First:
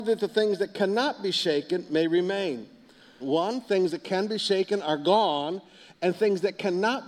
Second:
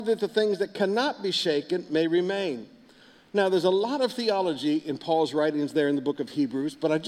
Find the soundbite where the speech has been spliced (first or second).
first